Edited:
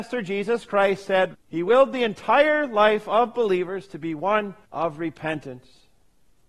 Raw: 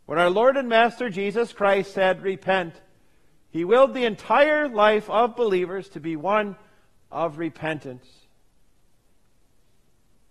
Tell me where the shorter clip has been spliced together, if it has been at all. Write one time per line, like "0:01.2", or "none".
0:01.3
0:04.6